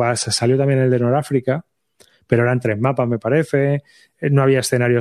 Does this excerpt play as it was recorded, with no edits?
yes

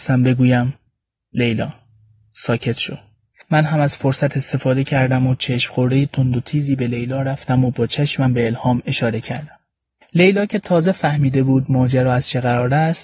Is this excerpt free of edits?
no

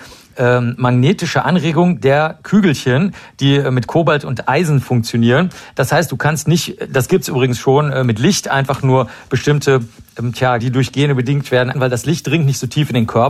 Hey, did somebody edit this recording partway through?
yes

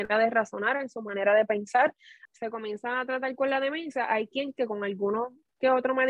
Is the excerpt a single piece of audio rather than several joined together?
no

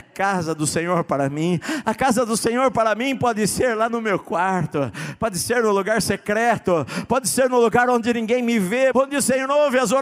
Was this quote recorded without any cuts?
no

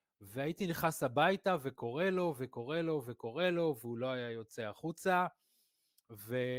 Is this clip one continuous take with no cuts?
yes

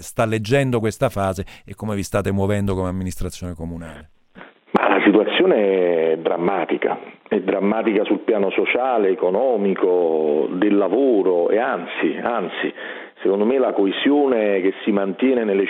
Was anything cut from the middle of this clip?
no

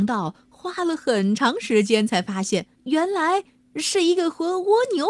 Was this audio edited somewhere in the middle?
yes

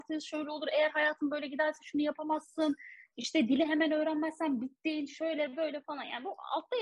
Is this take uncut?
yes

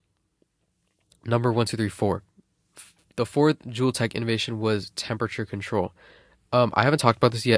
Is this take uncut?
yes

